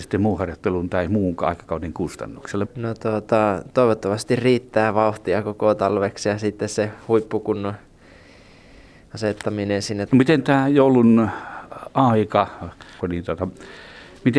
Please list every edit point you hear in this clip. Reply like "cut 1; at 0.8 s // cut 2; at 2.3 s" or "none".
cut 1; at 2.6 s // cut 2; at 10.1 s // cut 3; at 13.0 s